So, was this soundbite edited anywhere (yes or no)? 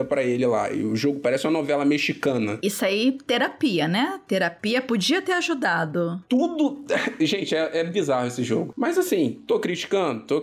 no